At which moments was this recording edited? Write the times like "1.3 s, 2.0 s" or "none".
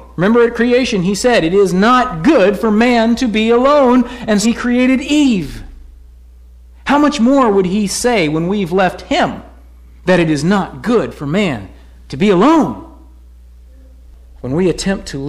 4.4 s